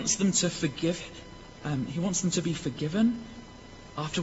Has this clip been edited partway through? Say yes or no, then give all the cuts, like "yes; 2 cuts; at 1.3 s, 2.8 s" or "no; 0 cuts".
no; 0 cuts